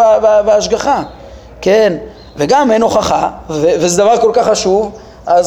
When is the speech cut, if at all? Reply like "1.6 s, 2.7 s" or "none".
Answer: none

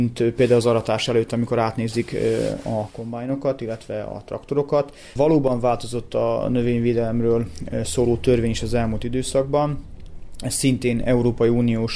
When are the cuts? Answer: 5.1 s

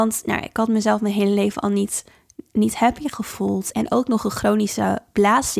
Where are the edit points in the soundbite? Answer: 3.7 s

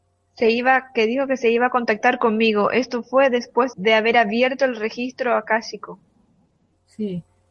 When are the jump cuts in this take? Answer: 3.7 s

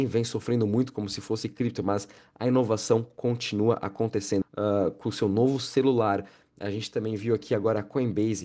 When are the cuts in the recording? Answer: 4.4 s

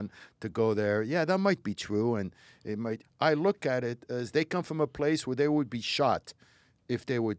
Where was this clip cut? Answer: 3.0 s

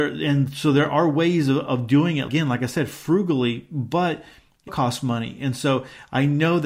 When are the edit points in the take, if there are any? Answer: 2.3 s, 4.7 s

